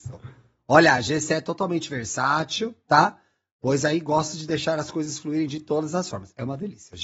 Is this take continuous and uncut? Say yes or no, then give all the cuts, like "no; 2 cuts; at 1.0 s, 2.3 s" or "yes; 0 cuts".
yes; 0 cuts